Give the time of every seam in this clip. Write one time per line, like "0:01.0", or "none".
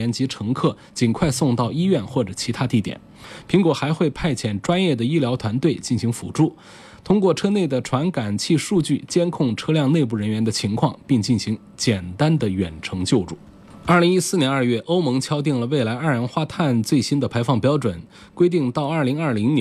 none